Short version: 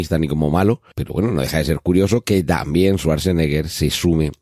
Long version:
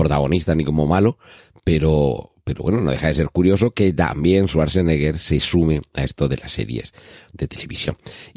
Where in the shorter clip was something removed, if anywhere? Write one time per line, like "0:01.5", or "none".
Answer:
0:00.9